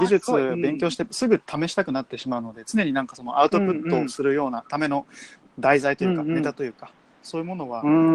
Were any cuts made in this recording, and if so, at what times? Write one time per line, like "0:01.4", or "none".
none